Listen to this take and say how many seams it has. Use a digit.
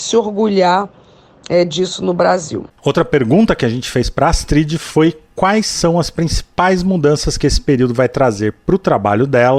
0